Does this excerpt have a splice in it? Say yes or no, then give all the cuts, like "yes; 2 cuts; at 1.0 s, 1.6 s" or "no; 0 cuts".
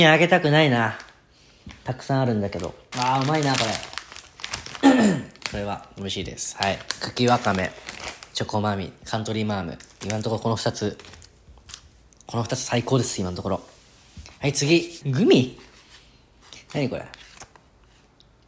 yes; 2 cuts; at 2.9 s, 15.0 s